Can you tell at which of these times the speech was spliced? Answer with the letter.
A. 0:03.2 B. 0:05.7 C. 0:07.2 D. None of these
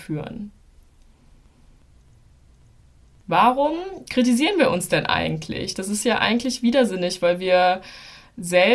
D